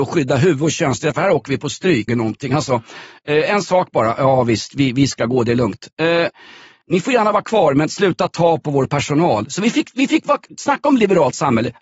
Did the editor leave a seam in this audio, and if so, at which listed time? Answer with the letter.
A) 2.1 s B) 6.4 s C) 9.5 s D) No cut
A